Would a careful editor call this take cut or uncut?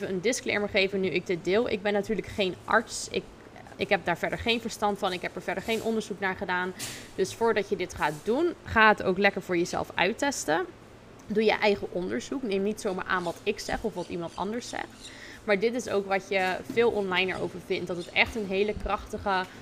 cut